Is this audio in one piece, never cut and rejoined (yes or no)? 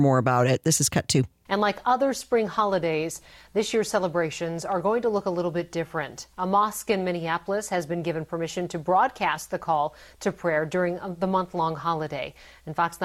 no